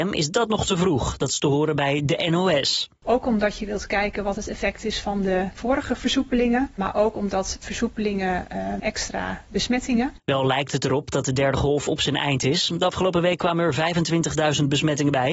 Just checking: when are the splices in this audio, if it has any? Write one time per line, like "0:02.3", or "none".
0:08.8
0:10.2